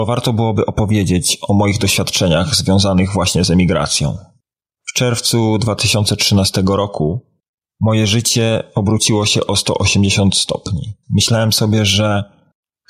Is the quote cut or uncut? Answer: cut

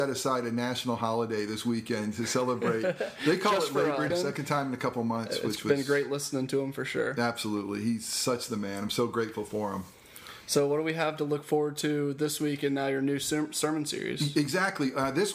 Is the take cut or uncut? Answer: cut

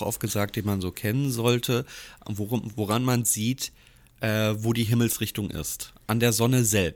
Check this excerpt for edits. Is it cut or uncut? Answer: uncut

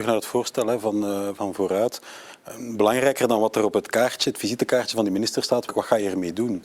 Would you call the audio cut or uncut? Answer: cut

